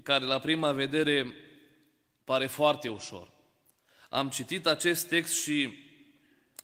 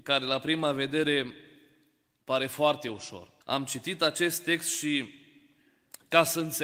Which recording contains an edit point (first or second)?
second